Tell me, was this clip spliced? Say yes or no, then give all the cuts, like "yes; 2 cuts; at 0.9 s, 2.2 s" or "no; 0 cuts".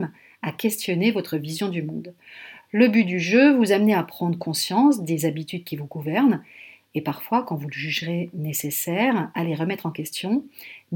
no; 0 cuts